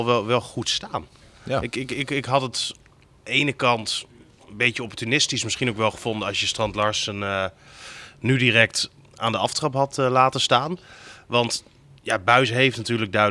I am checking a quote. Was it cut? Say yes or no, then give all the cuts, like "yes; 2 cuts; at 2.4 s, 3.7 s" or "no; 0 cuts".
no; 0 cuts